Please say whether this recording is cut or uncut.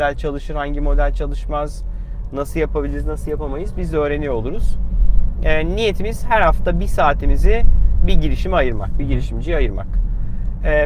uncut